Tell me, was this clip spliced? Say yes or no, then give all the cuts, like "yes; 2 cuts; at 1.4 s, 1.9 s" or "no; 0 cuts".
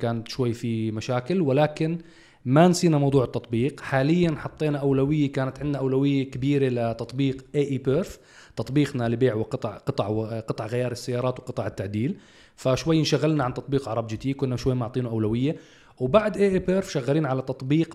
no; 0 cuts